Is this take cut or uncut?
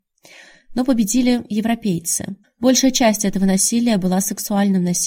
cut